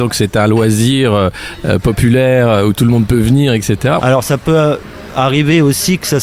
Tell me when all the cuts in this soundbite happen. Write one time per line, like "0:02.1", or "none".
0:04.0